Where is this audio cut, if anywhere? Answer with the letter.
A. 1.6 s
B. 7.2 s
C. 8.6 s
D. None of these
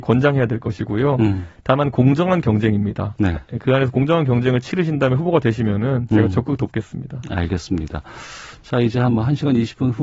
D